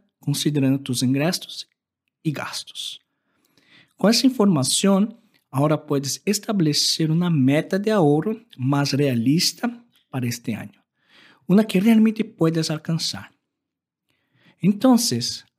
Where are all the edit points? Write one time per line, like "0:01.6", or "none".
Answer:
none